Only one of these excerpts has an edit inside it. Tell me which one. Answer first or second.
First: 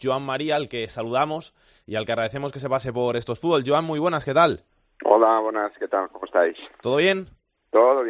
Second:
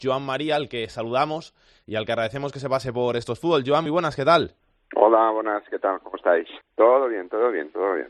second